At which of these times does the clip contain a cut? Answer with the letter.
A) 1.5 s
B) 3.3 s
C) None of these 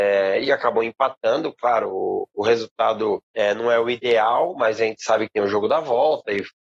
B